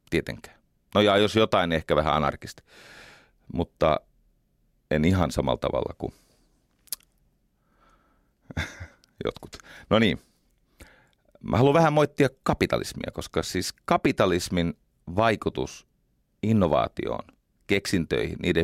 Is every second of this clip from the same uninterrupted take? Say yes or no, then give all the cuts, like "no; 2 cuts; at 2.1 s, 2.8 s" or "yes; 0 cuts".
yes; 0 cuts